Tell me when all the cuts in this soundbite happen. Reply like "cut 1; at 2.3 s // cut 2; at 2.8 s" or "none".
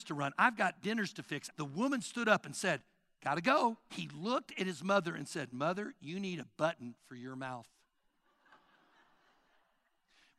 cut 1; at 1.5 s // cut 2; at 3.9 s

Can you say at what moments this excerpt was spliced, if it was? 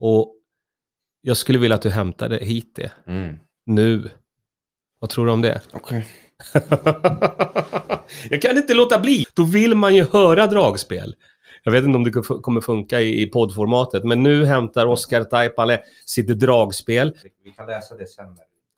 cut 1; at 9.2 s // cut 2; at 17.2 s

